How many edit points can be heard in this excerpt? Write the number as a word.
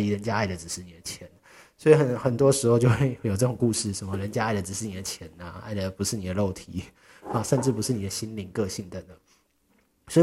one